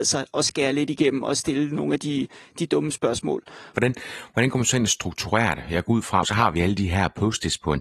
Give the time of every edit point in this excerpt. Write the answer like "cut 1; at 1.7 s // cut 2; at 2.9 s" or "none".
cut 1; at 3.7 s // cut 2; at 6.2 s

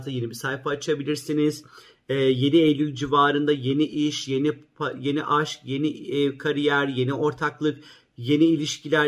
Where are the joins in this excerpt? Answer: none

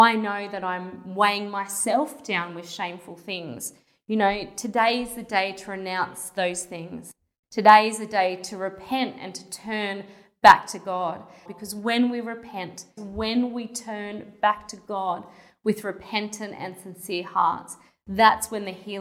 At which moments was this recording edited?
cut 1; at 11.5 s // cut 2; at 13.0 s

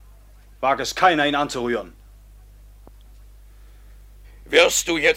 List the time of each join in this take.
cut 1; at 4.2 s

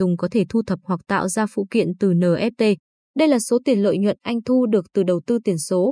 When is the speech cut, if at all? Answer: cut 1; at 3.0 s

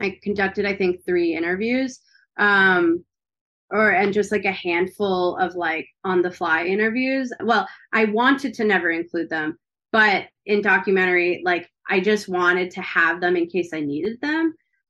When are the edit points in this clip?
cut 1; at 7.4 s

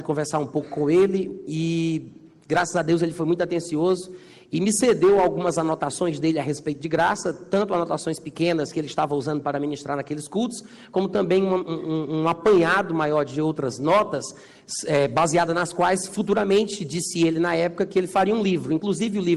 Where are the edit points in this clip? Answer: none

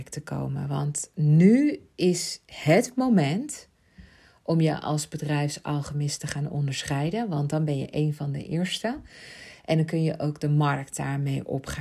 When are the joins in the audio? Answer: none

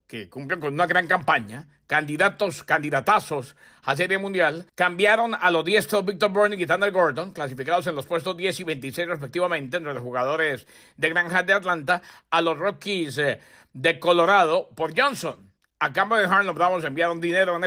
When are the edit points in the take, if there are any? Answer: cut 1; at 4.7 s

